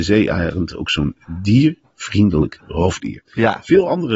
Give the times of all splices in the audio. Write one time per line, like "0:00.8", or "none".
none